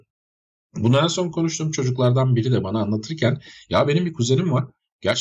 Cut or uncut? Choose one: uncut